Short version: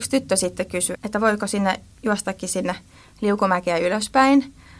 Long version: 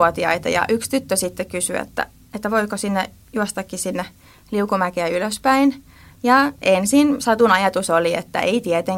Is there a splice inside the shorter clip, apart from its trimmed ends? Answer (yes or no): yes